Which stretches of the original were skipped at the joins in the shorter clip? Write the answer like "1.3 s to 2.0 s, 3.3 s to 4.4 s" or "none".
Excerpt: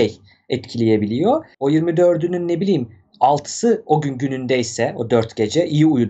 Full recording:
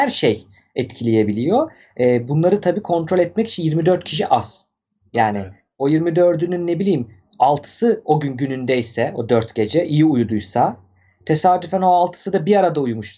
1.8 s to 5.7 s